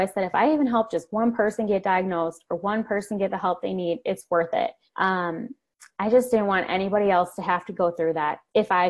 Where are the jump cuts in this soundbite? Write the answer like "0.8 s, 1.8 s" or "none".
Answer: 4.9 s